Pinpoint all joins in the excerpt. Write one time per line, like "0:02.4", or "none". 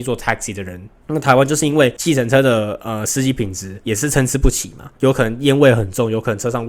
0:01.0